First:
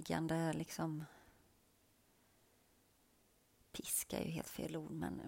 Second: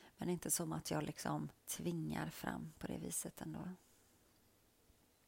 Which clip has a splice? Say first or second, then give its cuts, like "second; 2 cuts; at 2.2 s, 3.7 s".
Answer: second; 1 cut; at 1.6 s